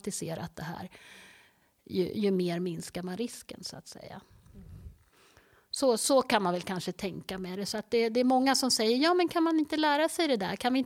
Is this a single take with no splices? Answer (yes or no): yes